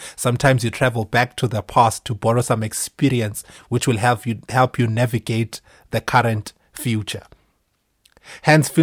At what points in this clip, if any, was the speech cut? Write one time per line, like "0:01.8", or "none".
none